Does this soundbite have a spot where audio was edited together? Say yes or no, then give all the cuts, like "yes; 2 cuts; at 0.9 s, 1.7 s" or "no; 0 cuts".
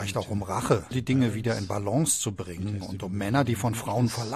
yes; 1 cut; at 0.9 s